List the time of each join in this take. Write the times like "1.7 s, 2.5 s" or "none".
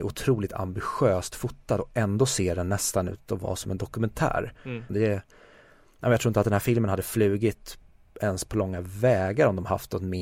4.9 s